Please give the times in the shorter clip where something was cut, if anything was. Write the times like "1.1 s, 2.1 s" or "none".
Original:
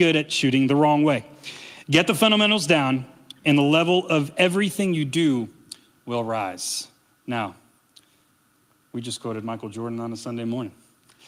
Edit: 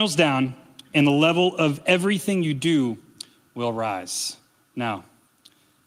none